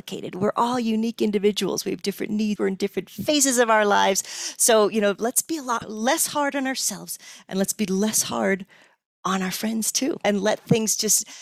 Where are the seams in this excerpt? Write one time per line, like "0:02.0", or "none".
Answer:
0:02.6